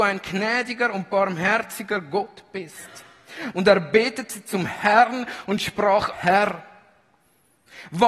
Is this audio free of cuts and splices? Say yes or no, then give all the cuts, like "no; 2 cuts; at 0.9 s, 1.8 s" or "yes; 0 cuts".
no; 2 cuts; at 3.5 s, 6.1 s